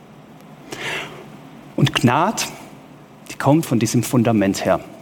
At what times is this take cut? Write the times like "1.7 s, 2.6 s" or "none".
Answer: 3.6 s